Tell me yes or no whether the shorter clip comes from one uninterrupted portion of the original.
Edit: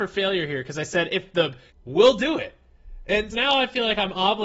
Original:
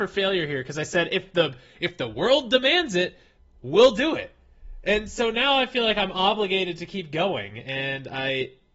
no